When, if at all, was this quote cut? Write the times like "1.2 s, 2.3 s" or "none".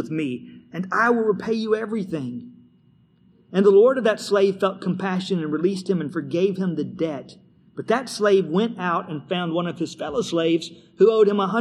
none